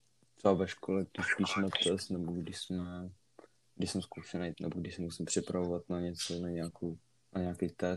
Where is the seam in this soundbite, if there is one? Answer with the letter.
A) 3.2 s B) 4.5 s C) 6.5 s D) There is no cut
B